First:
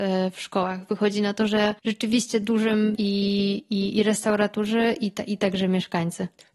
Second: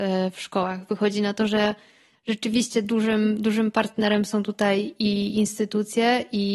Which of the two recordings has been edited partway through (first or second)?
first